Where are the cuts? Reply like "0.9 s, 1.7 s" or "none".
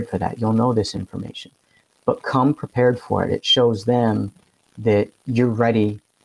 none

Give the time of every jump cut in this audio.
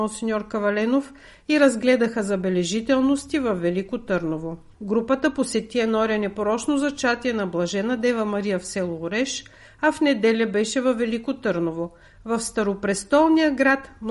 4.7 s

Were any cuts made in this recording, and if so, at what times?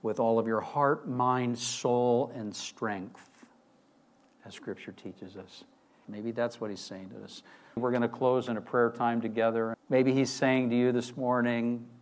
6.0 s, 7.8 s, 9.7 s

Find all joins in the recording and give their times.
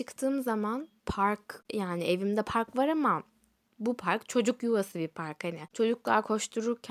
1.0 s

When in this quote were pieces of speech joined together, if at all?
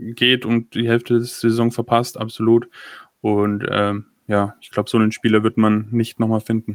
none

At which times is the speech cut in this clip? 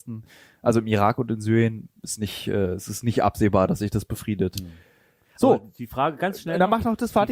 none

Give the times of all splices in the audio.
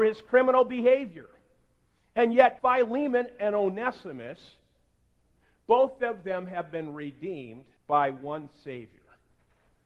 2.6 s, 7.8 s

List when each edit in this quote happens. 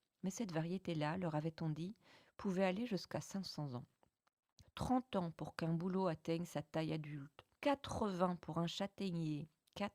4.6 s, 7.6 s

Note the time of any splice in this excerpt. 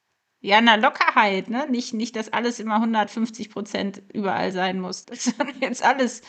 5.0 s

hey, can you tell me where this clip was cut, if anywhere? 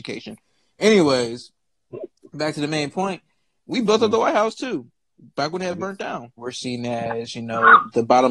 3.6 s, 6.4 s

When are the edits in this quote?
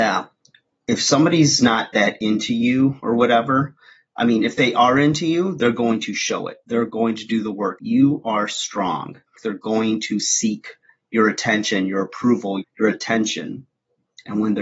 7.8 s, 9.4 s, 12.6 s

